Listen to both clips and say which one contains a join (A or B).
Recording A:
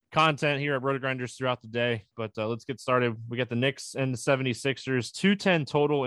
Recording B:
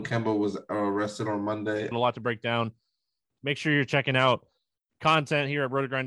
B